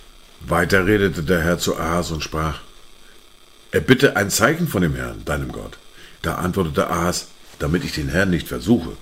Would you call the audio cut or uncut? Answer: cut